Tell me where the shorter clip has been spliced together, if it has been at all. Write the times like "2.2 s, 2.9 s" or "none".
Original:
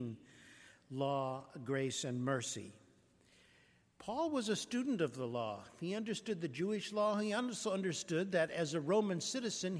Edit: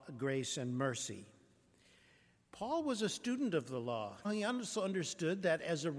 4.2 s

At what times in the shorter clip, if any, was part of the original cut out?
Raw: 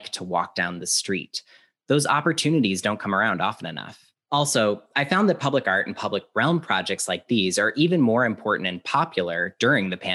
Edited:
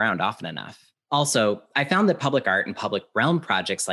none

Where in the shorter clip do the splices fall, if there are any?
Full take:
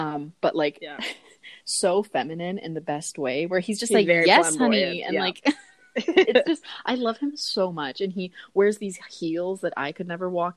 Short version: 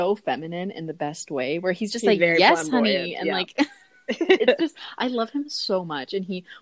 none

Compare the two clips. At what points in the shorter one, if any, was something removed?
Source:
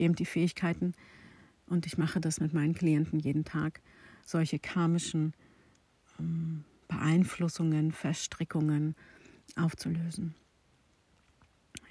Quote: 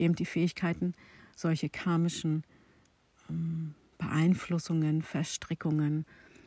1.2 s

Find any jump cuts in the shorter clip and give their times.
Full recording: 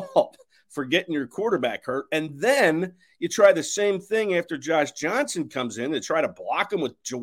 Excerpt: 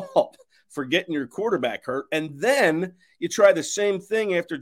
none

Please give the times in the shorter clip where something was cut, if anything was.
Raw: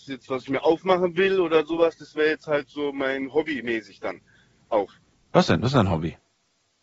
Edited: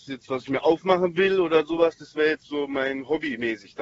2.4 s

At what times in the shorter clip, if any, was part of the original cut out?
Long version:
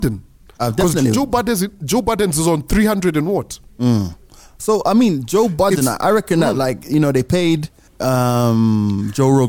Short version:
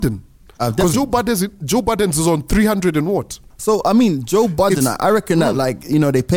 0.9 s, 3.5 s

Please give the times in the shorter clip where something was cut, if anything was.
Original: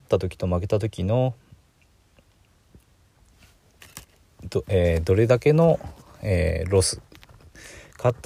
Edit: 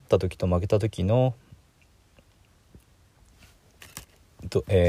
none

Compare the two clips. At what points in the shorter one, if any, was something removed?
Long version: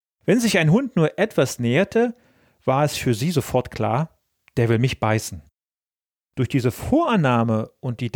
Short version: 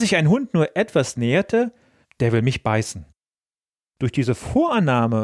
2.0 s

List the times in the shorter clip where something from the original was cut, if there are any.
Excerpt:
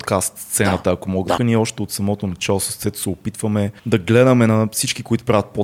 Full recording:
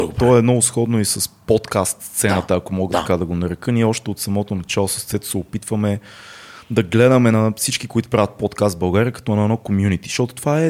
1.4 s, 3.8 s

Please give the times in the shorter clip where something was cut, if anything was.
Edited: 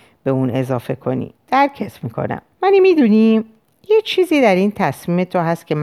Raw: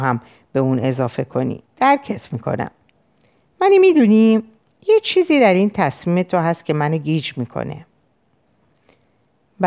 2.5 s

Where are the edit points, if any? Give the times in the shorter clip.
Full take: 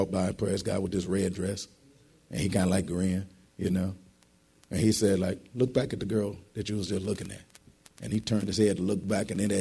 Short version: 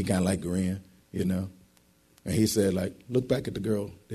none

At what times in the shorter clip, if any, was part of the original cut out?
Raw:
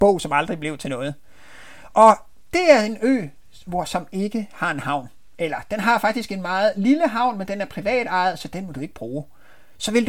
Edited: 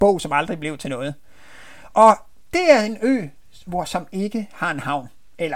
none

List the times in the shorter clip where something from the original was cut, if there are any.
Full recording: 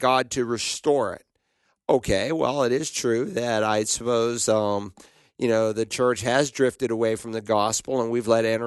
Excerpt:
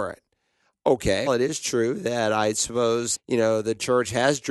1.3 s, 3.1 s

